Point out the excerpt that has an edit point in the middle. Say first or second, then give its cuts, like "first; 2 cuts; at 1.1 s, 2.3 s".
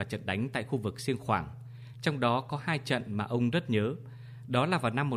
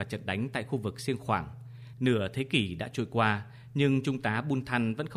second; 1 cut; at 1.9 s